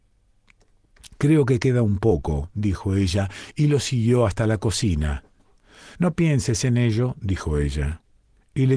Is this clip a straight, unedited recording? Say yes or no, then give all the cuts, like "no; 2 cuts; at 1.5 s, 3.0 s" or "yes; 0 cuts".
no; 1 cut; at 5.9 s